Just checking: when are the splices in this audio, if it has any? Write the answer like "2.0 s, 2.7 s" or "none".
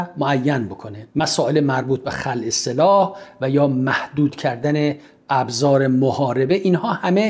1.1 s